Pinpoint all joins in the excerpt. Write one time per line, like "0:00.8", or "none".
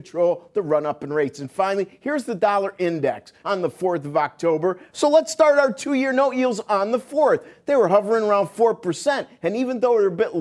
0:03.4
0:04.9